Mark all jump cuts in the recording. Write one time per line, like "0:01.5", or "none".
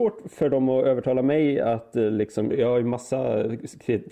0:02.5